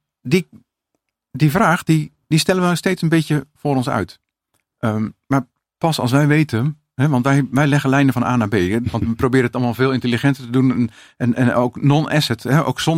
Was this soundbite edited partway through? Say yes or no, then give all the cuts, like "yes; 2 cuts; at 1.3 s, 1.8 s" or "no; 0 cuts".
yes; 1 cut; at 8.8 s